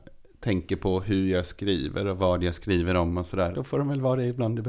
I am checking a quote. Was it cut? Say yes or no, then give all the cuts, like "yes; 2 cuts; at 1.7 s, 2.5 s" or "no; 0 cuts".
yes; 1 cut; at 3.5 s